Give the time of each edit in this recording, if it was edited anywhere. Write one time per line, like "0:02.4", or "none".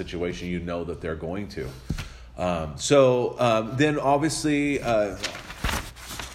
none